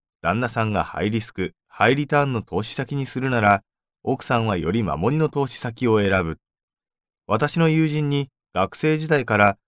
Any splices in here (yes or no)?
yes